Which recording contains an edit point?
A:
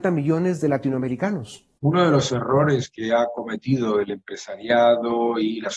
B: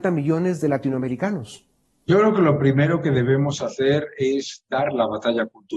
A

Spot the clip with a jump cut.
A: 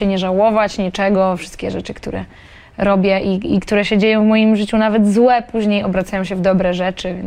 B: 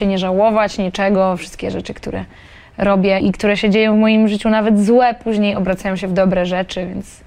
B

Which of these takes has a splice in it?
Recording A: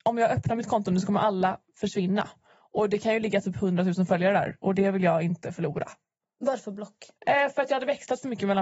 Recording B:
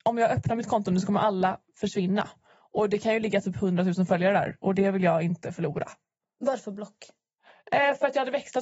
A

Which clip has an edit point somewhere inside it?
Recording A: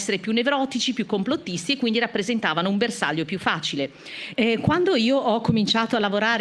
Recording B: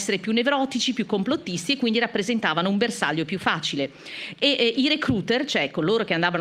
A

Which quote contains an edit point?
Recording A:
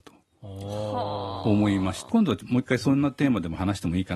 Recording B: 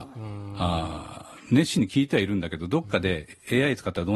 A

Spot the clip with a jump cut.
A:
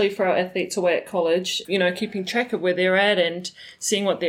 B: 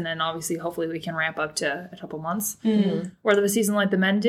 A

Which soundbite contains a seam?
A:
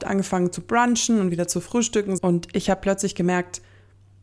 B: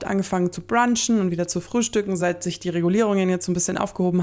A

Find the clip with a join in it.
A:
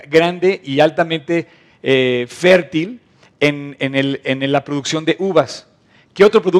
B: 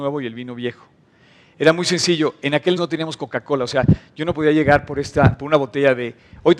B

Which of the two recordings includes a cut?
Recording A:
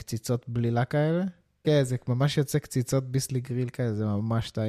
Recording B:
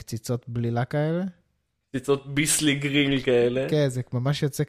A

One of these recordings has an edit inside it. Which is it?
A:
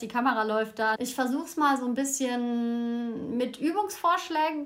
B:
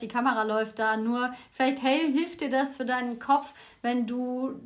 A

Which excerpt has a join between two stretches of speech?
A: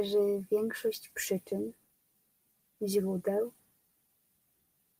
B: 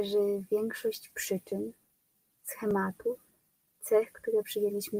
B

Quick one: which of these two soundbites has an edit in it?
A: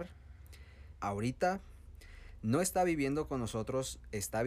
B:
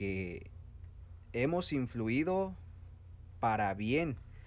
A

